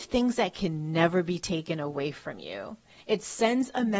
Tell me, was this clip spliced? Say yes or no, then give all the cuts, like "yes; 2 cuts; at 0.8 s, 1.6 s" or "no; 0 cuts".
yes; 1 cut; at 3.0 s